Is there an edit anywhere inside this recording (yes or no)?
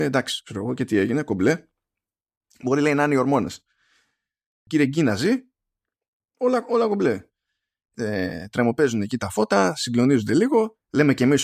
yes